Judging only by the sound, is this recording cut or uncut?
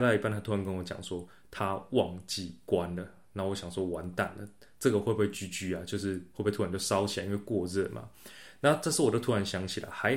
uncut